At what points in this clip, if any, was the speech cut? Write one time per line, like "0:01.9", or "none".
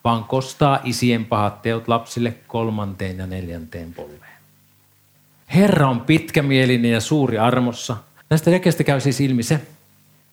0:05.4
0:08.2